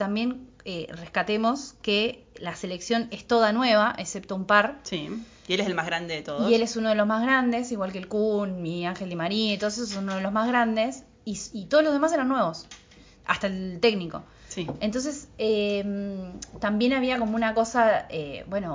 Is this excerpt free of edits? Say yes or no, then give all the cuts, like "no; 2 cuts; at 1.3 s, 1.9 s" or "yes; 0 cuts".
yes; 0 cuts